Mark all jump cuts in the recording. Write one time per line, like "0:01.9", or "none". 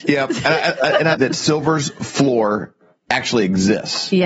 0:01.1